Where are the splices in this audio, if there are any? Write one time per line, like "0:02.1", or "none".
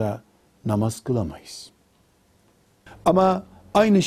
0:02.9